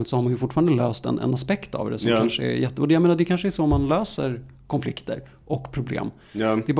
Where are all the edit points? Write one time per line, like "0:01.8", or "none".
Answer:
none